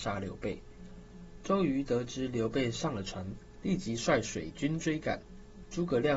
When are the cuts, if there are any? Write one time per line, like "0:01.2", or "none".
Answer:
0:01.4